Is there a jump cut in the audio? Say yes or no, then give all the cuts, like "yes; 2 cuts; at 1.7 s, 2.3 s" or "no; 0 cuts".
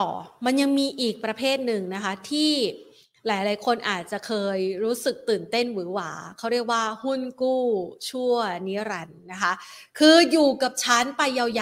no; 0 cuts